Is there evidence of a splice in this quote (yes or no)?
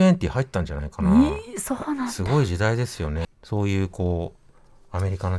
yes